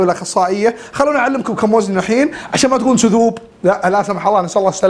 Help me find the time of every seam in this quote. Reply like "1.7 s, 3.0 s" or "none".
none